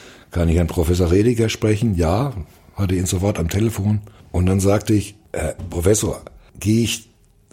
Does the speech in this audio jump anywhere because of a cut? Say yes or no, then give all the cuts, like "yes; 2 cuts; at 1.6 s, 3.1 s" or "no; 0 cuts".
no; 0 cuts